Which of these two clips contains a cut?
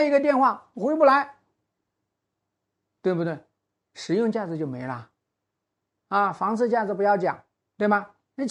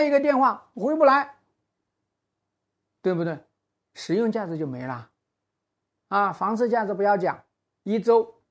first; 1 cut; at 7.6 s

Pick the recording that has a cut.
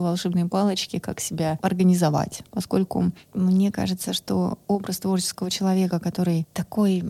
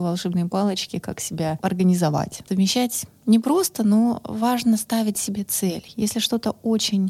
second; 1 cut; at 2.5 s

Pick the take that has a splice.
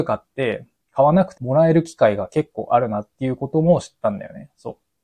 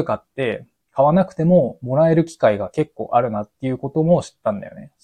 first; 1 cut; at 1.4 s

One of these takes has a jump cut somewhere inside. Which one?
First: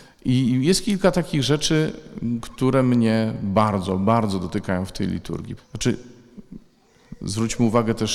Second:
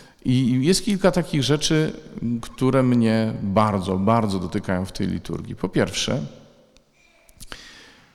first; 1 cut; at 5.6 s

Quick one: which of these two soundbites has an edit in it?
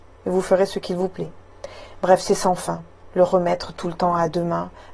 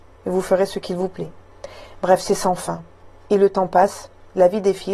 second; 1 cut; at 3.1 s

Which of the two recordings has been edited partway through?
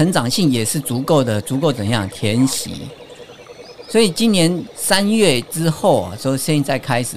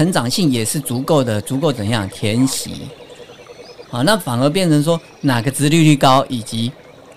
second; 1 cut; at 3.8 s

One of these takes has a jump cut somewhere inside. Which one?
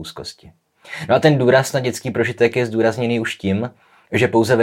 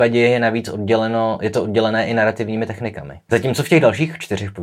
second; 1 cut; at 3.3 s

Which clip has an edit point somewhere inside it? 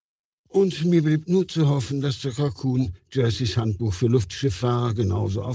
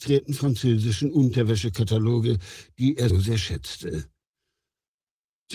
second; 1 cut; at 3.1 s

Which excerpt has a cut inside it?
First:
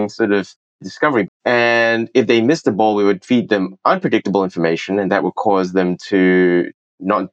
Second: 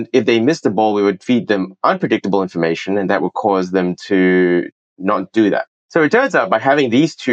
first; 1 cut; at 1.2 s

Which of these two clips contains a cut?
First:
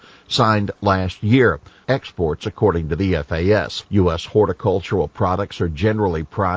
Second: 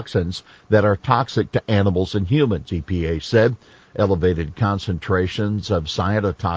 first; 2 cuts; at 1.8 s, 3.9 s

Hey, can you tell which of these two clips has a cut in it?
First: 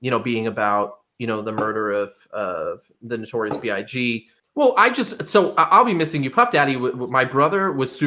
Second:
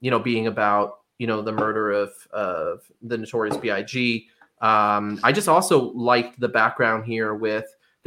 first; 1 cut; at 4.4 s

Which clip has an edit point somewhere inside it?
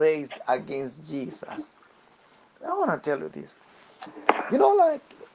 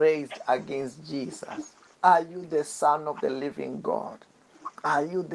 second; 1 cut; at 1.9 s

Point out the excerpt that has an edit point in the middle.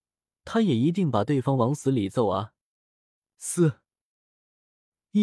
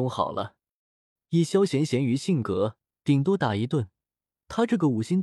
second; 2 cuts; at 1.2 s, 2.9 s

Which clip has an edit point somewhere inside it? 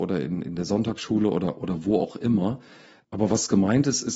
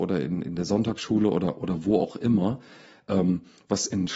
first; 1 cut; at 3.0 s

